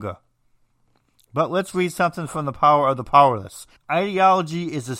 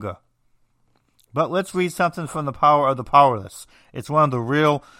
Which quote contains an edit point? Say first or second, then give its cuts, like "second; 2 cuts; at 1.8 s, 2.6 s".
first; 1 cut; at 3.8 s